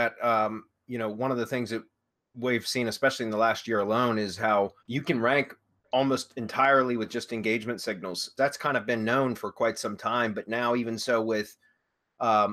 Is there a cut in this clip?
yes; 2 cuts; at 4.8 s, 8.4 s

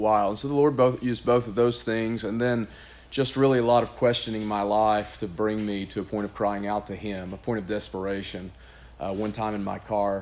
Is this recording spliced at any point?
no; 0 cuts

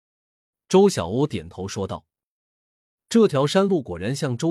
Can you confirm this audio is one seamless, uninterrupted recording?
no; 1 cut; at 3.0 s

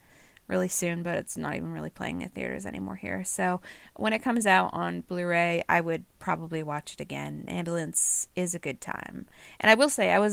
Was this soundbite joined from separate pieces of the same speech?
no; 0 cuts

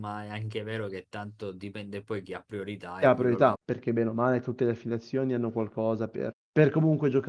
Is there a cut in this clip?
yes; 2 cuts; at 3.5 s, 6.3 s

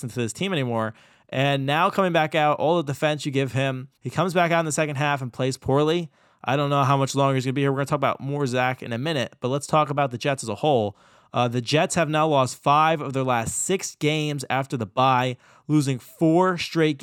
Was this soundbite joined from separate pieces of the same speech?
yes; 1 cut; at 4.0 s

